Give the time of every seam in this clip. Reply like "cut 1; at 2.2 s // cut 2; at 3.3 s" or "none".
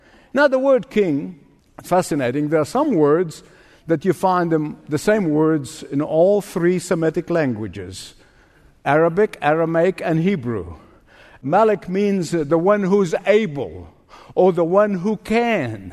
cut 1; at 1.9 s